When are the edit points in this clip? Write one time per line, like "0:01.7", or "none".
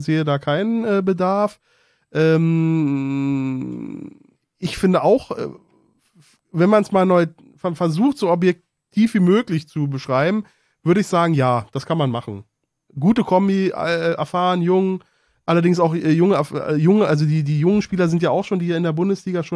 none